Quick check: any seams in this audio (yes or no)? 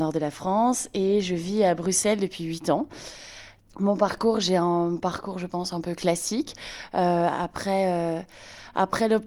no